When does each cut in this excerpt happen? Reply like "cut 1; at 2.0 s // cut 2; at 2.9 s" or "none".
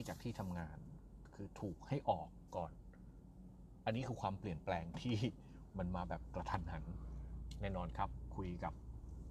none